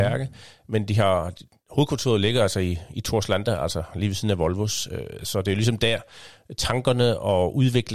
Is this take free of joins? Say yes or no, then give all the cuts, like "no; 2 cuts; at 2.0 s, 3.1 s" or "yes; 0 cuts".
yes; 0 cuts